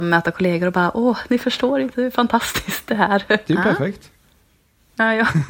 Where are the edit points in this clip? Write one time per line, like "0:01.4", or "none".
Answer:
0:01.3
0:03.4

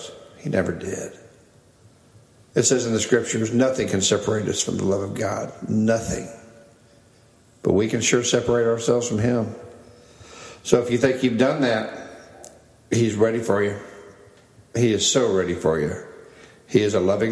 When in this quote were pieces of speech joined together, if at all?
none

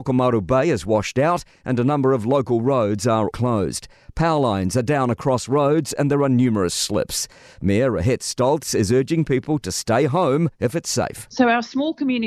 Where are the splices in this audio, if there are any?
0:03.3

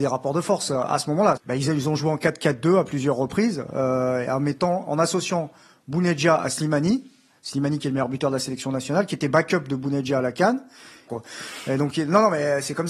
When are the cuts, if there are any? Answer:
0:01.4
0:11.1

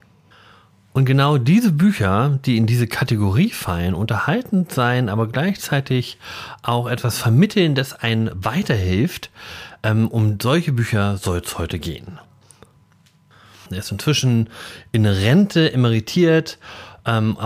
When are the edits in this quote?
0:13.7

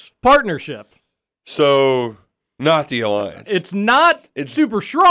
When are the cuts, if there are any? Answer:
none

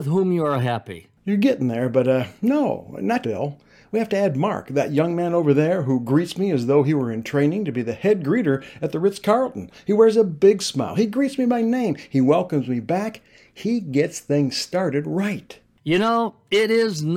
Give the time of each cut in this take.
0:03.2

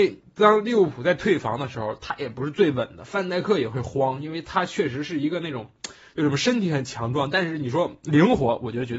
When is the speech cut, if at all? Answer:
none

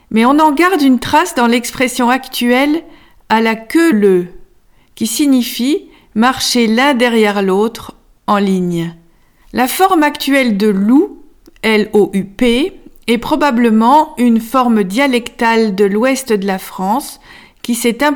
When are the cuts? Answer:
0:03.9
0:09.4

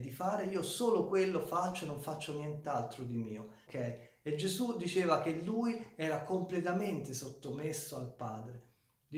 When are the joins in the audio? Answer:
0:03.7

